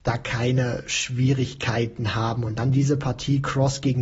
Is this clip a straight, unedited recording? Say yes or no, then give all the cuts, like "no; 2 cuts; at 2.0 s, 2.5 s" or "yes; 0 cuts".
yes; 0 cuts